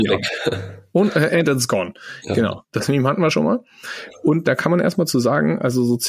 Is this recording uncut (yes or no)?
yes